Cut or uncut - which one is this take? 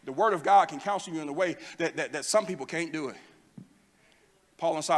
uncut